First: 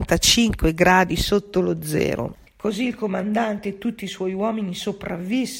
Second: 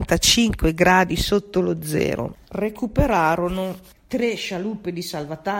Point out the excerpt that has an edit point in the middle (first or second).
first